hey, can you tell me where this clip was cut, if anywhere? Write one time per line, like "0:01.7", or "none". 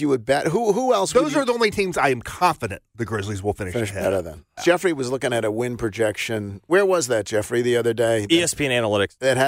0:04.6